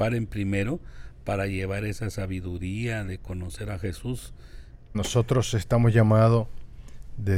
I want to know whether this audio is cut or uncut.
cut